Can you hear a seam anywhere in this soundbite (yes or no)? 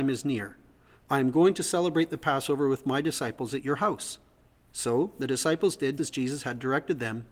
yes